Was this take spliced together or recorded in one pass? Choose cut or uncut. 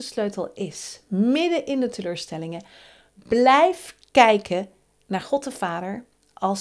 uncut